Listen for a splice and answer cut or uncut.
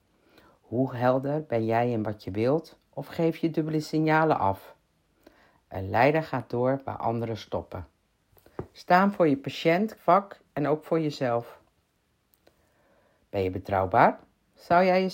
cut